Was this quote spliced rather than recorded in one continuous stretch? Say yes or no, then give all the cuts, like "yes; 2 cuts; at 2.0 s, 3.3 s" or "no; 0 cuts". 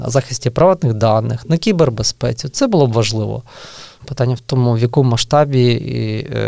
yes; 1 cut; at 4.0 s